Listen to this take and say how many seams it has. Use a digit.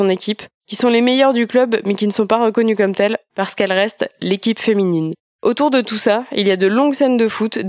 0